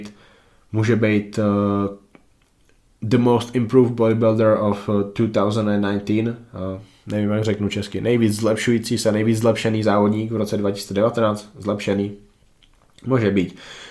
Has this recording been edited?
no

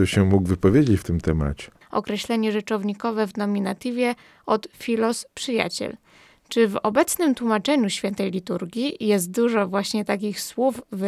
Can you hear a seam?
yes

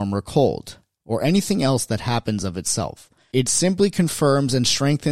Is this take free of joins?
no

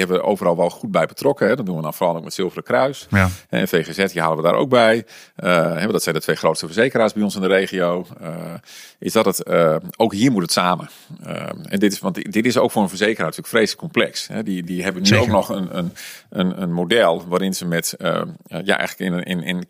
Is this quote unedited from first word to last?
yes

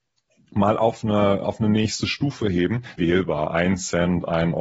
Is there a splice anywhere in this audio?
yes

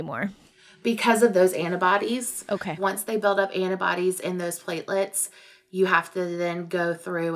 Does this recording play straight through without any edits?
yes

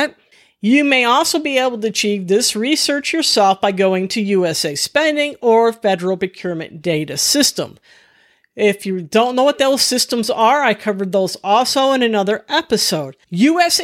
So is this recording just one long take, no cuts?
yes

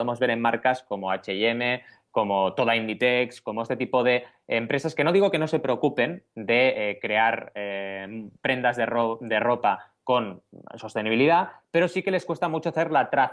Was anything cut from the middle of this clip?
no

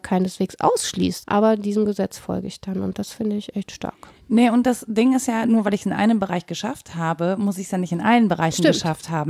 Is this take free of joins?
no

